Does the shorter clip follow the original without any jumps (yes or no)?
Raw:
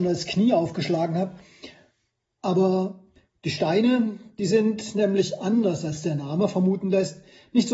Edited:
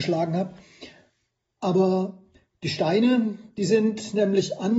yes